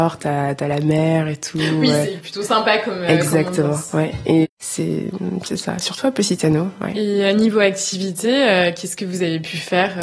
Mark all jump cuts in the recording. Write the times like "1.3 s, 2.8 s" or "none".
4.4 s